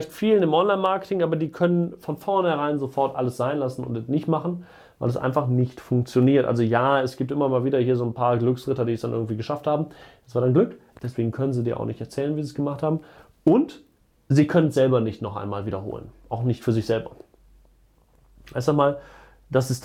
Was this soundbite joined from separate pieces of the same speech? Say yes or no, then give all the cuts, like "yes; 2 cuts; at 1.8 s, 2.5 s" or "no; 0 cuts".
yes; 1 cut; at 10.9 s